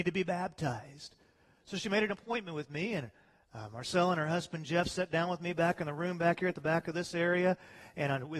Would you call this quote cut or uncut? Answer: uncut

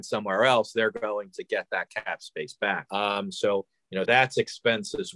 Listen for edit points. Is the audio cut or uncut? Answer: cut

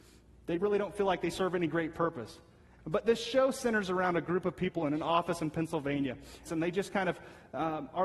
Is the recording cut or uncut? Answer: cut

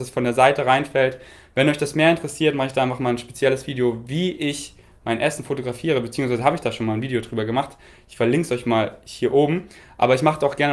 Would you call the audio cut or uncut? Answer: uncut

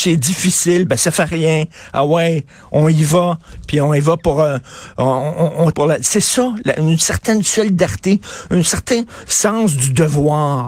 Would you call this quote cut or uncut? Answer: cut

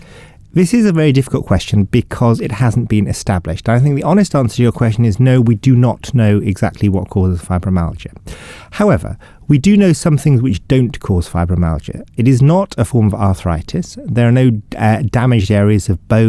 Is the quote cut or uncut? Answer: uncut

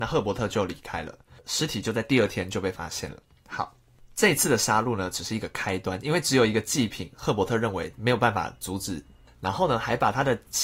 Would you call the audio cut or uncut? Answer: cut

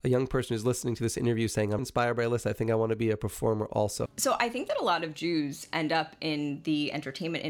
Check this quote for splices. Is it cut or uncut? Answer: cut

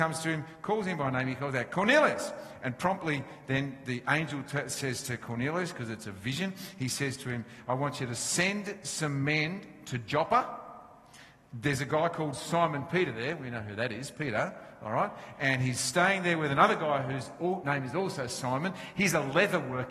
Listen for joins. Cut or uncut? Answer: uncut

